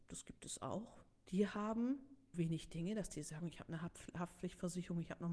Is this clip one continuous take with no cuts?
no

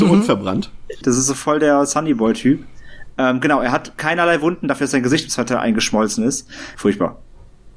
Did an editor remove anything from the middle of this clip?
yes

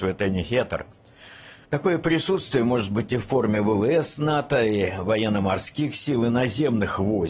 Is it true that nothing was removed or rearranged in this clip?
no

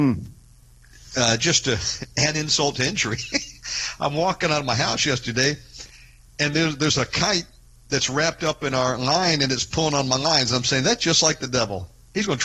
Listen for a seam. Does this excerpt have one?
no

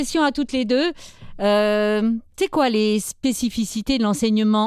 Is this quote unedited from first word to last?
yes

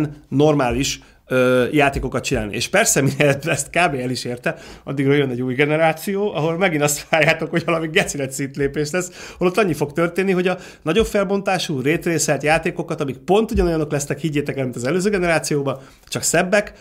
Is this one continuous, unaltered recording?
yes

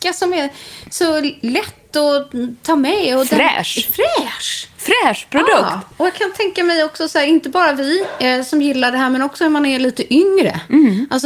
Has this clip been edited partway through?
no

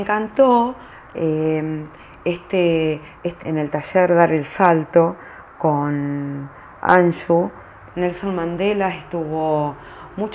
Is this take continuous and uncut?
no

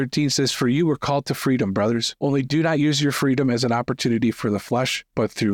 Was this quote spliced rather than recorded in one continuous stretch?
no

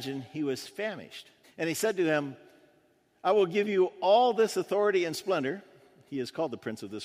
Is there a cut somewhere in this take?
yes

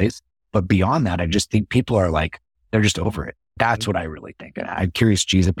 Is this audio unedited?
yes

